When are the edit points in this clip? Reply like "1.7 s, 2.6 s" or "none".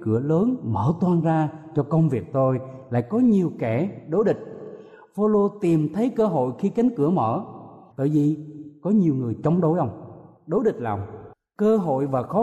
7.9 s